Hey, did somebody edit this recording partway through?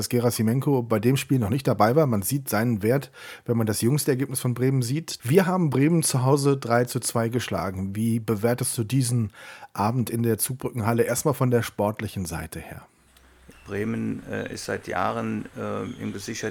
yes; 2 cuts; at 5.2 s, 13.5 s

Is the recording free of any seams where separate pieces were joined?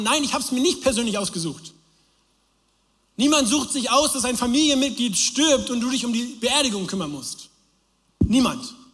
yes; 0 cuts

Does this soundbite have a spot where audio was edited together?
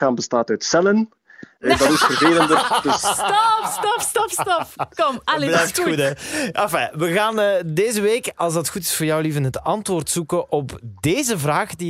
yes; 1 cut; at 1.6 s

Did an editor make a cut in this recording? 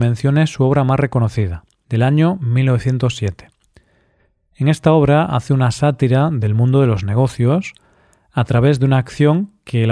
yes; 1 cut; at 1.8 s

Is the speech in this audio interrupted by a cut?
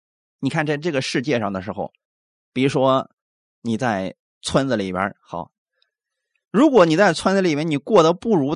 no; 0 cuts

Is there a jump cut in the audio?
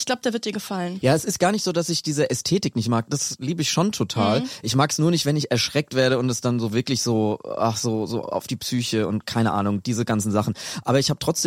no; 0 cuts

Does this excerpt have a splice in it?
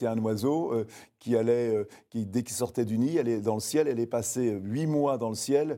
no; 0 cuts

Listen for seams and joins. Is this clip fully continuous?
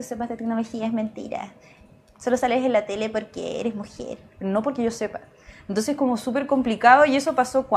yes; 0 cuts

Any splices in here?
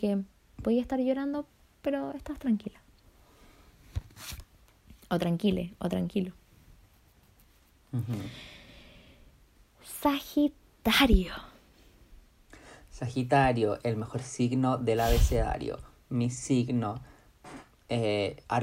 no; 0 cuts

